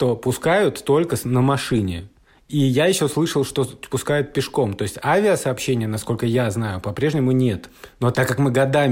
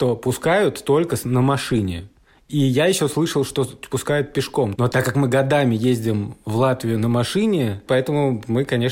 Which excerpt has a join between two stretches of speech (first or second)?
second